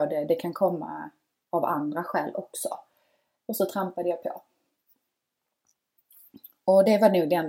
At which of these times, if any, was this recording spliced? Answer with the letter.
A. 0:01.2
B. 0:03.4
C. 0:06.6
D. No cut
B